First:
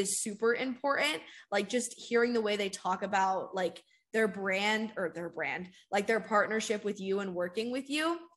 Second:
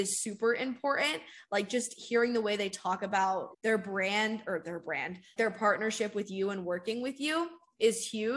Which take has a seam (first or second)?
second